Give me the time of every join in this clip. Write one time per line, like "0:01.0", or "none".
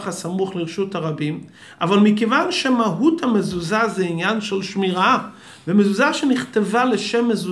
none

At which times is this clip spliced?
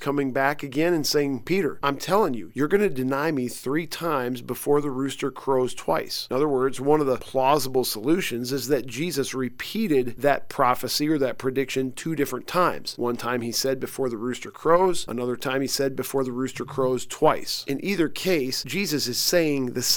none

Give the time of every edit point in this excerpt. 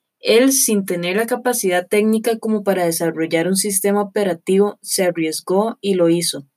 none

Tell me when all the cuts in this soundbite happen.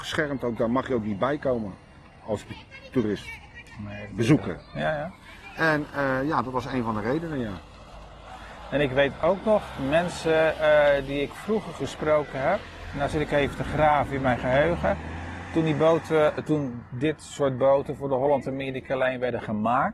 0:16.4

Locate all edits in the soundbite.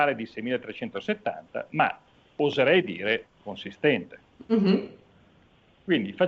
none

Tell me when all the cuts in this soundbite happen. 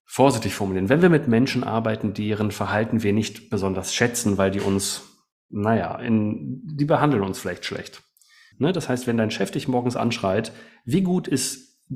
0:08.5

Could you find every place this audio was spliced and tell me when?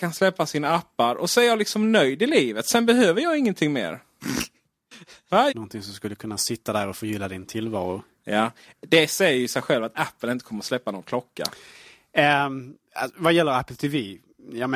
0:05.5

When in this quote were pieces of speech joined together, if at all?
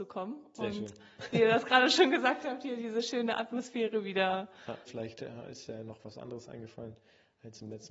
0:04.9

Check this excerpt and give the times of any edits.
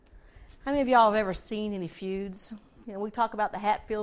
0:02.8

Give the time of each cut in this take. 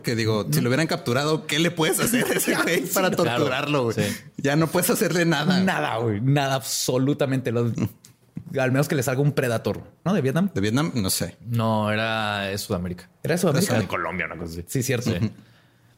0:10.1
0:13.8

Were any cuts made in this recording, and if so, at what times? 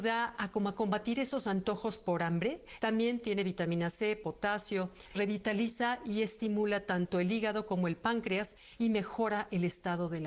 0:02.8
0:05.1

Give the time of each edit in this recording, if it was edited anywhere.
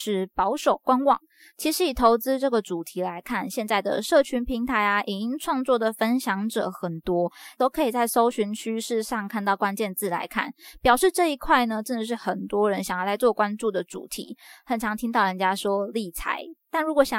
0:07.6

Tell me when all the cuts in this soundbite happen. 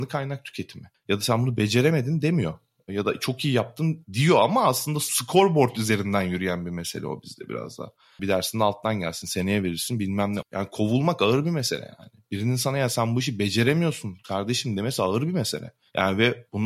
0:00.9
0:08.2
0:10.4

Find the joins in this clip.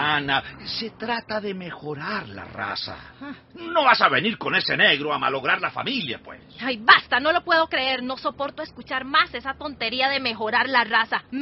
none

